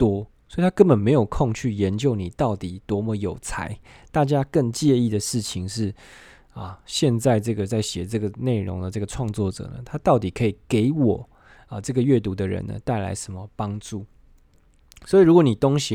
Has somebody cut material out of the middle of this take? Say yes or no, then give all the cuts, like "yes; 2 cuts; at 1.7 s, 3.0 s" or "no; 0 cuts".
no; 0 cuts